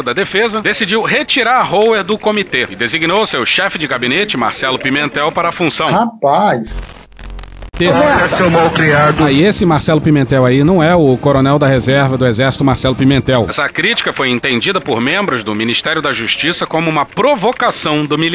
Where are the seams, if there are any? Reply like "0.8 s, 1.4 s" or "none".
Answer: 7.8 s, 13.5 s

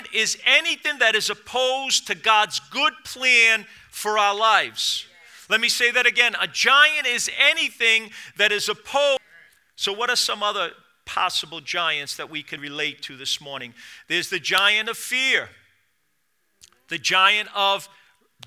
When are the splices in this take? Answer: 12.6 s

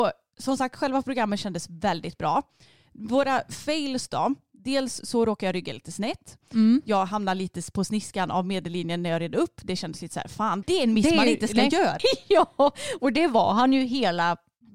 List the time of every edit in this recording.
10.6 s, 12.0 s

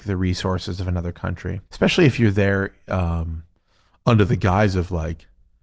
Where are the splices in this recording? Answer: 1.7 s

